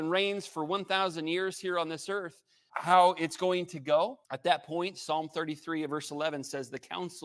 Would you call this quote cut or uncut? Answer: cut